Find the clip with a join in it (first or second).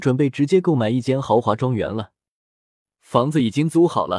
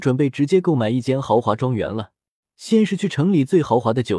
second